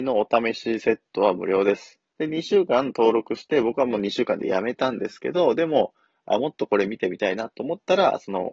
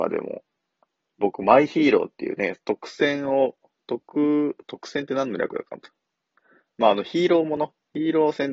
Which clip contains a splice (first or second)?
first